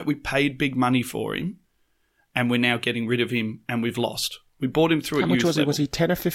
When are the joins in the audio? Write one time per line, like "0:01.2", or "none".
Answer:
none

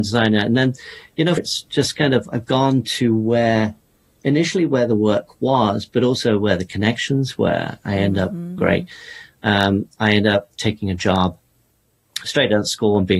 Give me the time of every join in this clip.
0:01.4
0:08.6

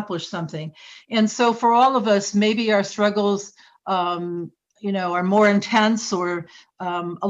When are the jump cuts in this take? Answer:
none

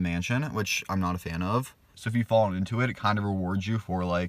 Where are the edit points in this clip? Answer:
0:01.9

